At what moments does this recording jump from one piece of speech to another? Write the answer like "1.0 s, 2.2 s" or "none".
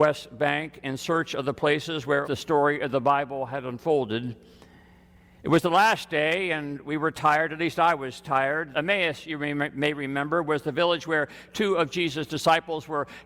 2.2 s, 8.7 s